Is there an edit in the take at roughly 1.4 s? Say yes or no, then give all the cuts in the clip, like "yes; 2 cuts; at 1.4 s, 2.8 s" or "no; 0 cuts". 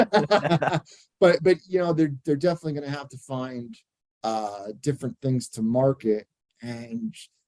no; 0 cuts